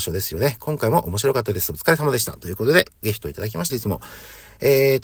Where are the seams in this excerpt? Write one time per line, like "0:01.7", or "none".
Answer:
0:03.7